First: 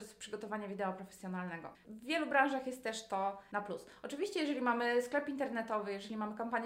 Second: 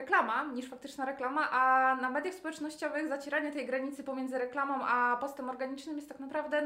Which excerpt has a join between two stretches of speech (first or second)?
first